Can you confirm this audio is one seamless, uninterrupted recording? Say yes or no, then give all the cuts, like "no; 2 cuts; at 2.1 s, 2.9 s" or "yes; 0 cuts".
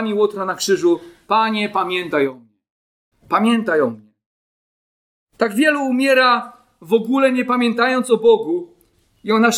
no; 1 cut; at 3.1 s